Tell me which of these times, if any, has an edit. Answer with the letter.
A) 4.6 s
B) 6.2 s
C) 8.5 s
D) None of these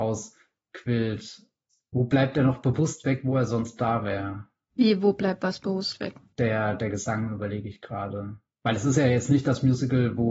D